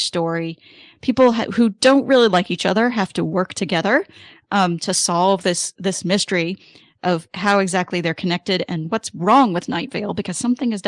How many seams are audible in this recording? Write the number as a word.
zero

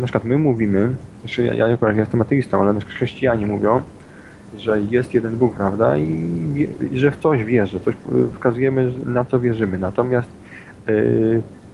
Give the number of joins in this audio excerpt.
one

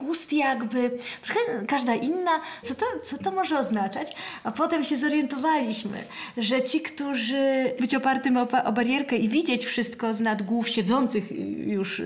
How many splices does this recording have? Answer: two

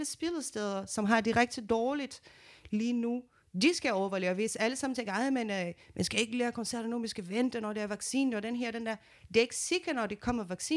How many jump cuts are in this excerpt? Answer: zero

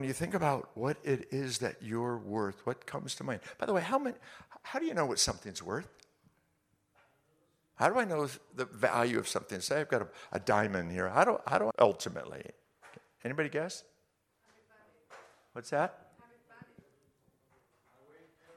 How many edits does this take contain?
one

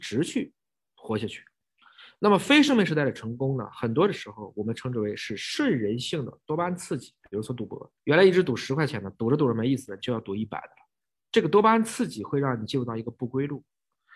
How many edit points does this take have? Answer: one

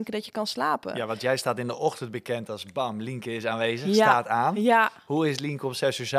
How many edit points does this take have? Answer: zero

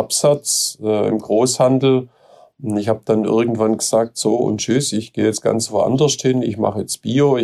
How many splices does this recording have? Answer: zero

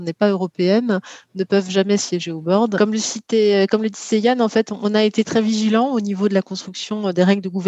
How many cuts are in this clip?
two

